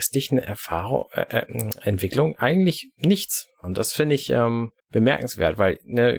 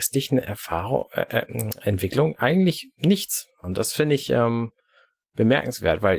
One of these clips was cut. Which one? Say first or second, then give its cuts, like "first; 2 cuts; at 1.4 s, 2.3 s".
first; 1 cut; at 4.8 s